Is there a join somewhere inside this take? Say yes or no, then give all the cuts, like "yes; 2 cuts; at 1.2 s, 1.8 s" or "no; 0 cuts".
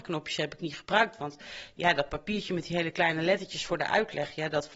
no; 0 cuts